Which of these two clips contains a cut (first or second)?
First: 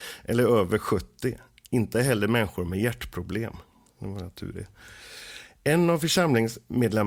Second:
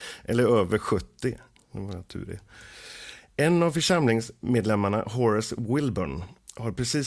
second